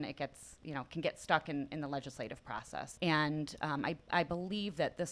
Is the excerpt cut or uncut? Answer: cut